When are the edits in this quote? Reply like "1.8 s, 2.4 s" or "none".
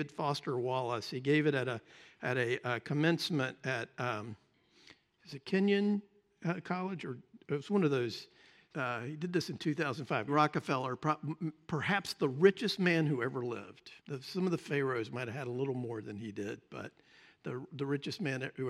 8.7 s, 10.3 s, 14.0 s